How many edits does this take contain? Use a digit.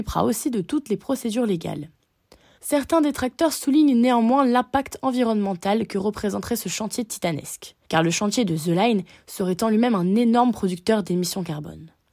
2